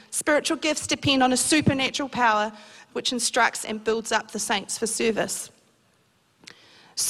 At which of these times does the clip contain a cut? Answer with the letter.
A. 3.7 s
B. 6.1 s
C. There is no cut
A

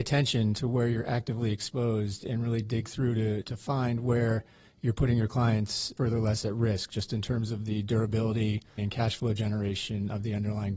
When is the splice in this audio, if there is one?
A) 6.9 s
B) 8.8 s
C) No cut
B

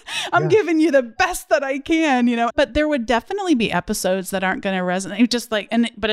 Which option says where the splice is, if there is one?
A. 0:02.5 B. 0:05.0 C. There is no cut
A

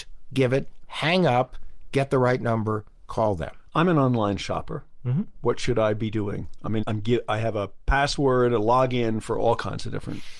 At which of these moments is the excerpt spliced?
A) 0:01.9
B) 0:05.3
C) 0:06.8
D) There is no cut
C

